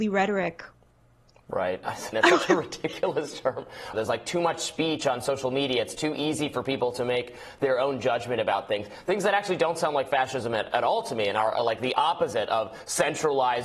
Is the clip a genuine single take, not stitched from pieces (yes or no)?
no